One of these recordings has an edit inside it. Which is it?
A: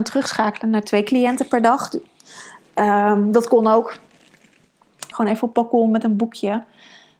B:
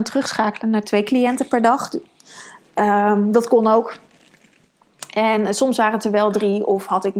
A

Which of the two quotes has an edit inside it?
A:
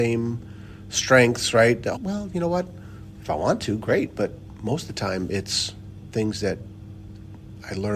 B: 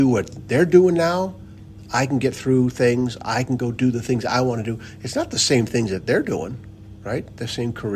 A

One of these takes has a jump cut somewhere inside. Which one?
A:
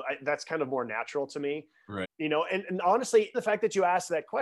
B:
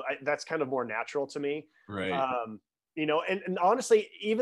A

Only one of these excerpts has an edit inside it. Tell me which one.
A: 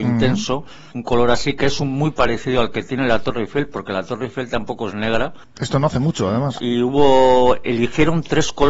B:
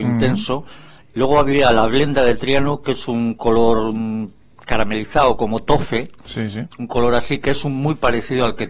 A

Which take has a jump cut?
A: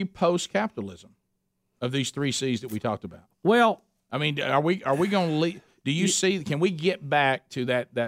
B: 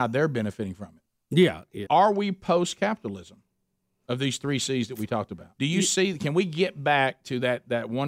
B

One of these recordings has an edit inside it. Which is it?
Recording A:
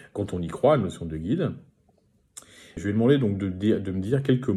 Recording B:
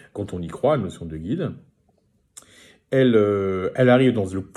A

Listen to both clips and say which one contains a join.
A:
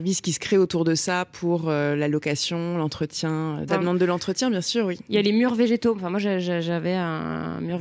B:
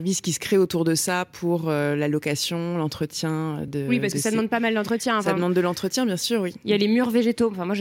A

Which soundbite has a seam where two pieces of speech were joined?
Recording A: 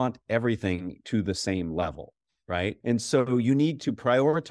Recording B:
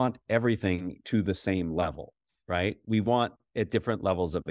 A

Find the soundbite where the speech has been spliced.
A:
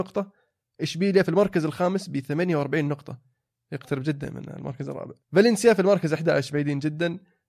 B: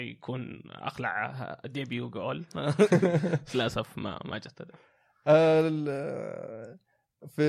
A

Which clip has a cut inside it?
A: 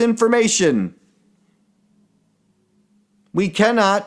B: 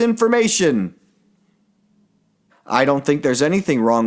B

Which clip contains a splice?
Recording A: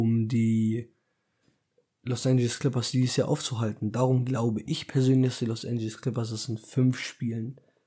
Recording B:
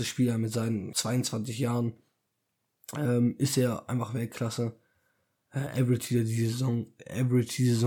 B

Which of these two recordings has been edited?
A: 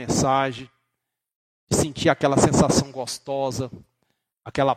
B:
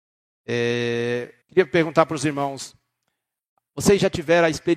B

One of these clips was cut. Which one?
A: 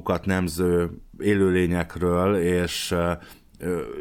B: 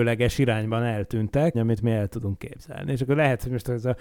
B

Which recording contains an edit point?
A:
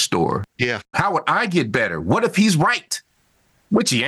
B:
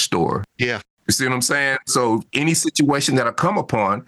A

